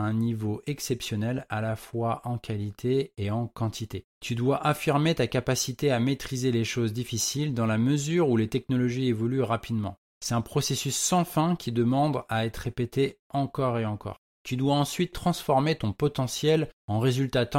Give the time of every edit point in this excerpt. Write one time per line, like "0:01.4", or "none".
0:14.3